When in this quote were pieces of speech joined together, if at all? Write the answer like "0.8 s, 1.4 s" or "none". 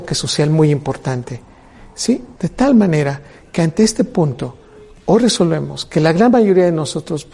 2.4 s

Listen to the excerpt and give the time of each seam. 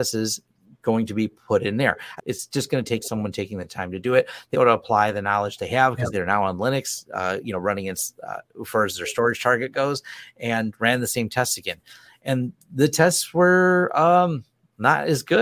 2.2 s, 4.5 s, 6.1 s

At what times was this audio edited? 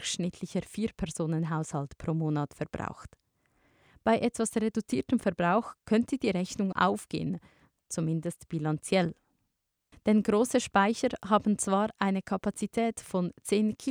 6.7 s, 9.9 s

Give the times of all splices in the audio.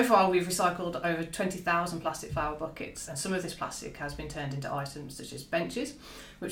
none

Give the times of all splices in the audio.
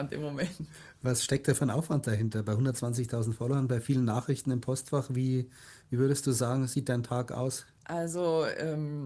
7.7 s

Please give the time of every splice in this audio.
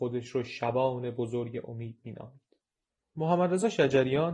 none

